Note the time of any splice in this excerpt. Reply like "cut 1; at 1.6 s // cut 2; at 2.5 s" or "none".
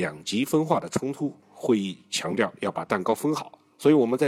cut 1; at 1.4 s